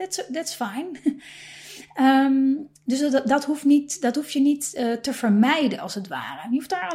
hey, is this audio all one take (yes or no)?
yes